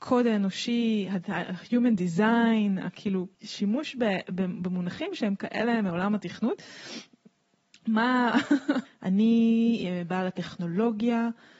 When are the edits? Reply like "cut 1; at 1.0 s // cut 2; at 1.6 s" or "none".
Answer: cut 1; at 3.3 s // cut 2; at 8.9 s